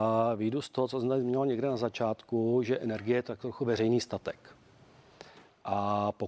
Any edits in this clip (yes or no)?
no